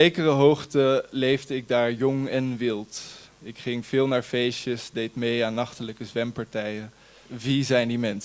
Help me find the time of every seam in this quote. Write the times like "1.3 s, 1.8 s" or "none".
7.3 s